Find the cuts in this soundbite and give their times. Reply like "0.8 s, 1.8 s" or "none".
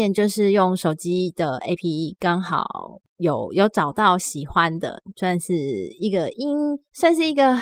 1.8 s